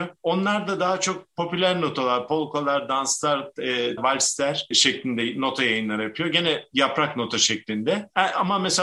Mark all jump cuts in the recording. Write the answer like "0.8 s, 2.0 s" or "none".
4.0 s